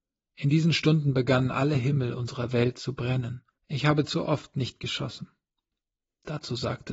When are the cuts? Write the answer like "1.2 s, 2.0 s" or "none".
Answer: 3.6 s